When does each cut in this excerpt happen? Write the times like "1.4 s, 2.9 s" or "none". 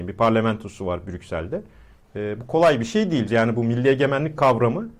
2.0 s, 3.3 s